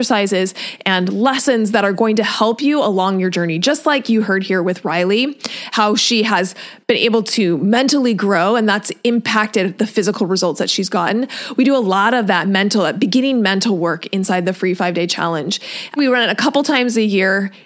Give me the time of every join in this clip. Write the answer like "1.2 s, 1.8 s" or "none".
16.0 s